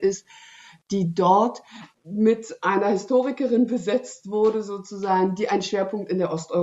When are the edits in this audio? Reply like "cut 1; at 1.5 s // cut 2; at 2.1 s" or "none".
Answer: cut 1; at 1.9 s

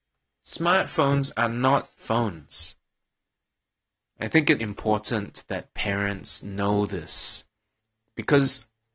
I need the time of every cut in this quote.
cut 1; at 1.9 s // cut 2; at 4.6 s

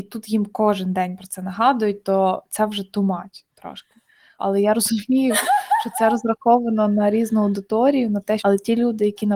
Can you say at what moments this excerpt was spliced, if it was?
cut 1; at 4.4 s // cut 2; at 8.4 s

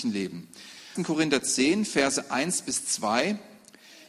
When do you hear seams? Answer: cut 1; at 1.0 s

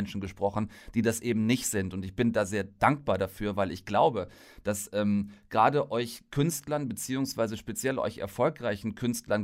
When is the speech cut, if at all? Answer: none

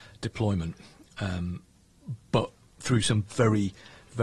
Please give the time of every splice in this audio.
none

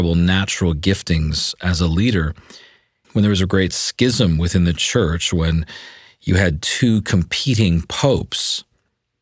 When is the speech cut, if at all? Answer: cut 1; at 3.0 s

